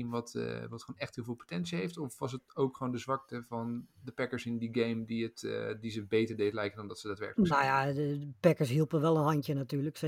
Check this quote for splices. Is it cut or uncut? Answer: uncut